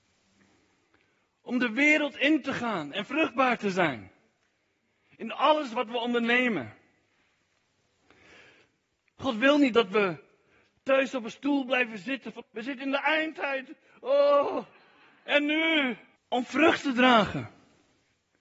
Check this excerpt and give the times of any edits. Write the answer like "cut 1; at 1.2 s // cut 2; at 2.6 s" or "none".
cut 1; at 12.4 s // cut 2; at 16.2 s